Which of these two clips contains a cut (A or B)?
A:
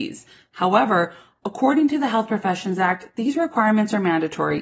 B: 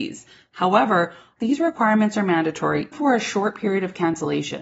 B